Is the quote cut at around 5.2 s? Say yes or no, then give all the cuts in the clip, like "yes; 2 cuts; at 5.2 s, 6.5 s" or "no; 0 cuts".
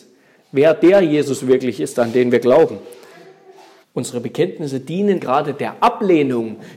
yes; 2 cuts; at 3.8 s, 5.2 s